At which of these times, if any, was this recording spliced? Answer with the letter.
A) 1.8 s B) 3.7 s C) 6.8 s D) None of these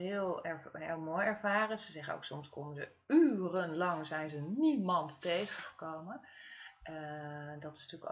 D